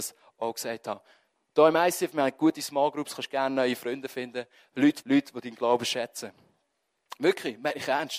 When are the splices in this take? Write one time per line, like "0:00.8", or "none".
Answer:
0:05.0